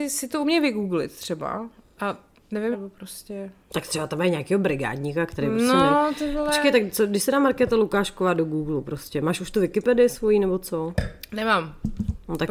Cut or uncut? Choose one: cut